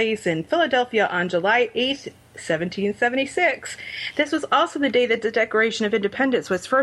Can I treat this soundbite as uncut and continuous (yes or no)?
yes